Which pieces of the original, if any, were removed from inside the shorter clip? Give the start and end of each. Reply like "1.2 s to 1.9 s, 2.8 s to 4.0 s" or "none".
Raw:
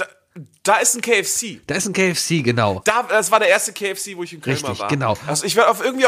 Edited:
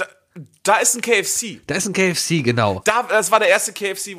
none